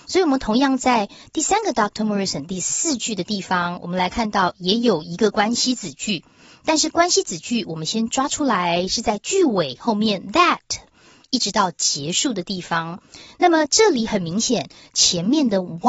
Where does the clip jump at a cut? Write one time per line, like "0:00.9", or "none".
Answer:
none